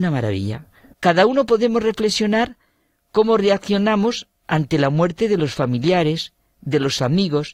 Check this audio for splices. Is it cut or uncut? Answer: cut